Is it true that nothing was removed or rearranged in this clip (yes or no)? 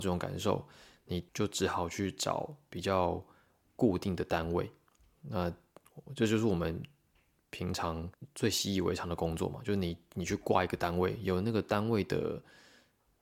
yes